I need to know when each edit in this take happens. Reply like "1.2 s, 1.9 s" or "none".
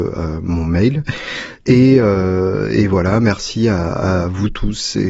1.6 s

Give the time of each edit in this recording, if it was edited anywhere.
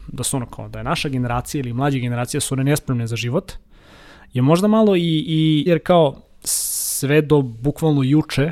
5.7 s

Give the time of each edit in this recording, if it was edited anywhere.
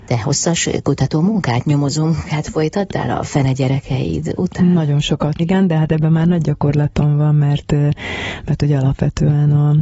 5.4 s

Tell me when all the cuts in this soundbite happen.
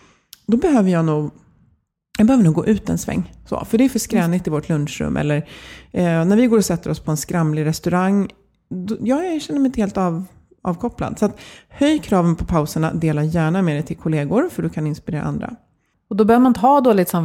15.9 s

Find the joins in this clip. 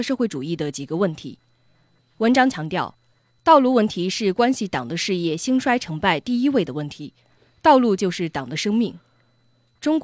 none

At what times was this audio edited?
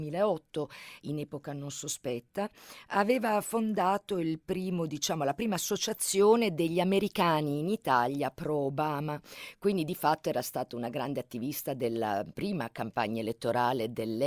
none

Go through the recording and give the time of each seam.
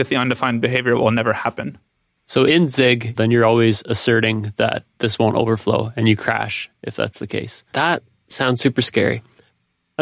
3.2 s, 7.7 s

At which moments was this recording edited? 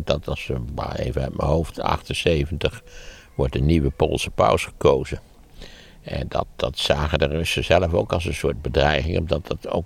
none

